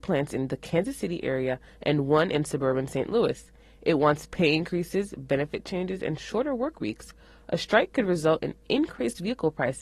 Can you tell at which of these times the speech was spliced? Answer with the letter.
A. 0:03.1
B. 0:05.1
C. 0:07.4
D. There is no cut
D